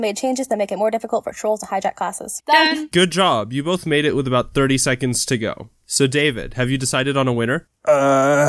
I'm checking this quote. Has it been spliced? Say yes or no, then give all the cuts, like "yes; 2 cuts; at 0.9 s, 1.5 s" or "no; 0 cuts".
yes; 1 cut; at 2.4 s